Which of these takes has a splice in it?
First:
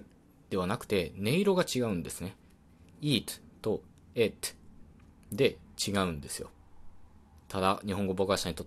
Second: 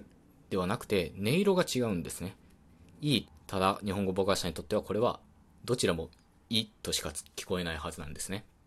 second; 1 cut; at 3.2 s

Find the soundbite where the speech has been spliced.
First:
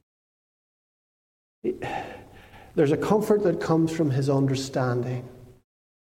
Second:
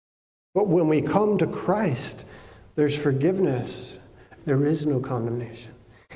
second; 1 cut; at 4.4 s

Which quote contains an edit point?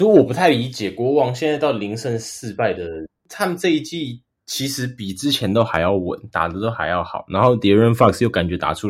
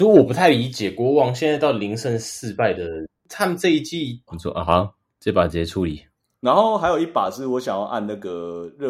second; 1 cut; at 4.3 s

